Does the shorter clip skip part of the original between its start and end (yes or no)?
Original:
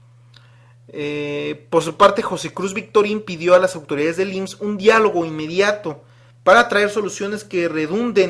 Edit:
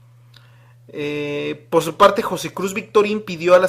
no